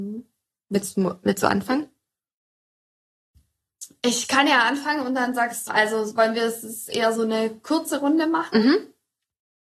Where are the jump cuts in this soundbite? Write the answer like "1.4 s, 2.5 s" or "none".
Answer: 5.7 s